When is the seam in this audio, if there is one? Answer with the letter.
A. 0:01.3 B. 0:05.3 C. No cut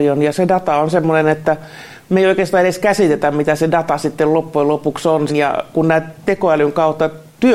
B